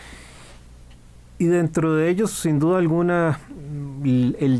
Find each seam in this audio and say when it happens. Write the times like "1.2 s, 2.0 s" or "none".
none

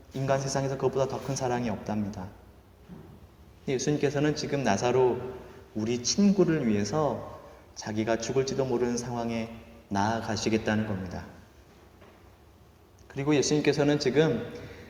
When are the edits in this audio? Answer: none

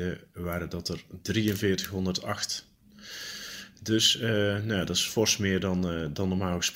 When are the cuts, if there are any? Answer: none

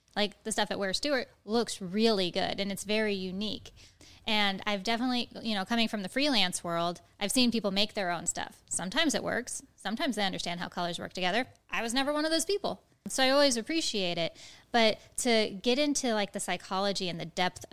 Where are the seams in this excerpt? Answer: none

